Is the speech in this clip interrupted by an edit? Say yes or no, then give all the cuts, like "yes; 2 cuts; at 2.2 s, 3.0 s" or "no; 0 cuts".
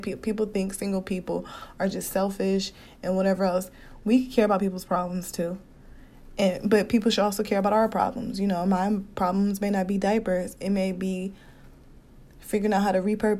no; 0 cuts